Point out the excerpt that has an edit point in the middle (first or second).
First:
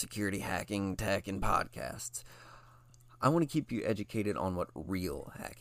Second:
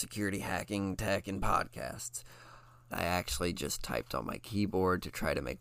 second